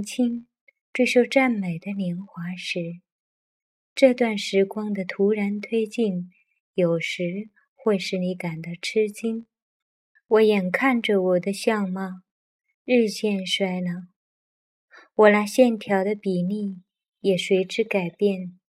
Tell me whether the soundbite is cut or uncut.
cut